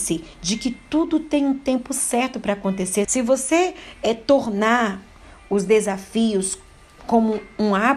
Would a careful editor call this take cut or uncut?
cut